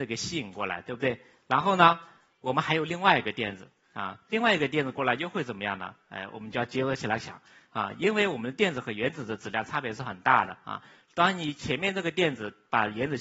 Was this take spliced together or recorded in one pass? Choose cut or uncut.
uncut